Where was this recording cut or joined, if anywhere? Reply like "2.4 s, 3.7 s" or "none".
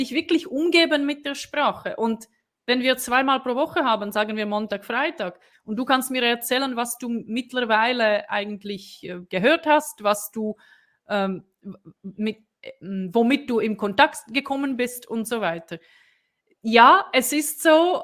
5.5 s

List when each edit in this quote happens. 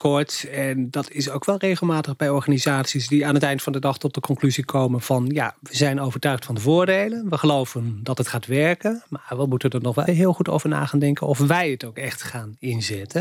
10.1 s

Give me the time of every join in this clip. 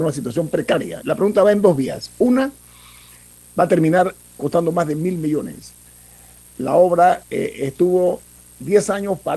1.0 s

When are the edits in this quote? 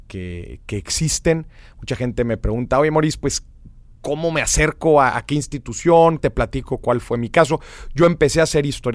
6.2 s

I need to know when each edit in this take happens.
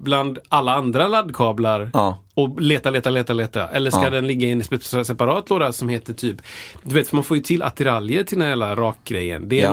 none

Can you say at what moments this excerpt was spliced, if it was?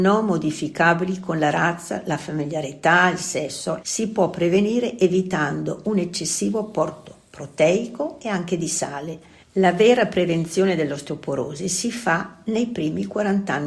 3.8 s, 9.4 s

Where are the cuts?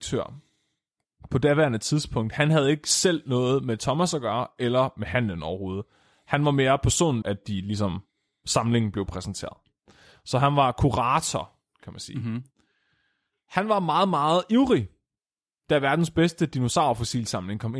7.2 s

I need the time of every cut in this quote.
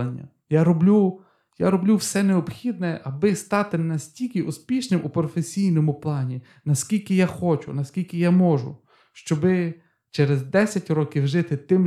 none

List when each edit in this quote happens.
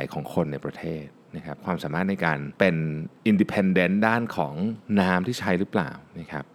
2.6 s

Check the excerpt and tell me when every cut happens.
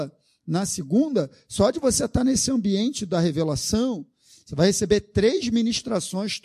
none

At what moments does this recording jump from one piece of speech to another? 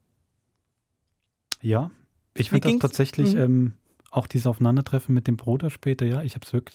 none

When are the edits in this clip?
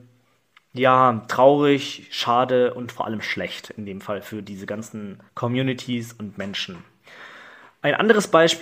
5.3 s

